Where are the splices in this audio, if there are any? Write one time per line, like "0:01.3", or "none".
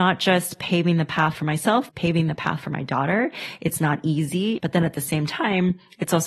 0:01.9
0:04.6